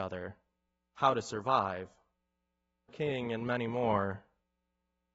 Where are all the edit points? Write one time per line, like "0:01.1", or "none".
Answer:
0:02.9

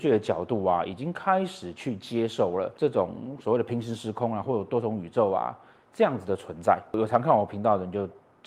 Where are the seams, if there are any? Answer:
none

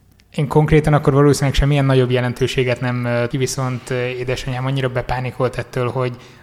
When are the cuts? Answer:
0:03.3

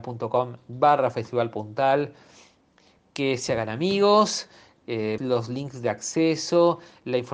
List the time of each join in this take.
0:05.2

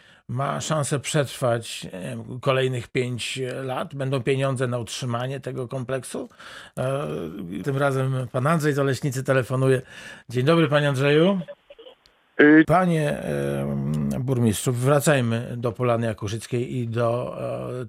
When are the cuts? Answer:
0:07.6
0:12.6

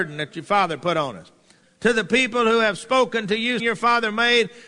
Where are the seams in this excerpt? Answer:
0:01.6
0:03.6

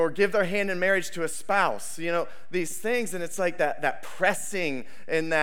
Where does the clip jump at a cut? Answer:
none

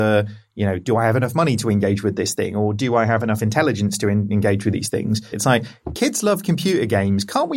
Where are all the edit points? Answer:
0:05.3

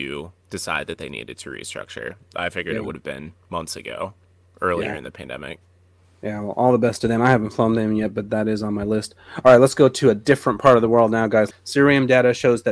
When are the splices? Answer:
0:11.5

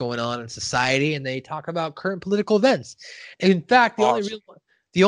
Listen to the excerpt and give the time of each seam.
0:03.3

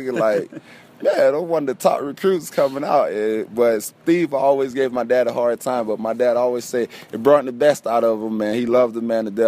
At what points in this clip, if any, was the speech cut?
none

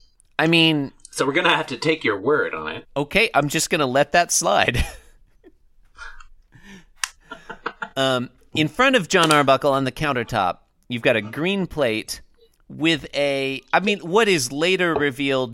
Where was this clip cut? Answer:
none

